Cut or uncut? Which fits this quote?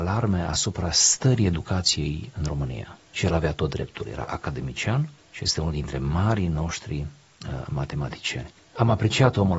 uncut